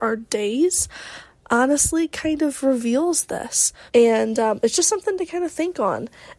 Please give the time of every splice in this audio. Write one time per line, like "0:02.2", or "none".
0:03.9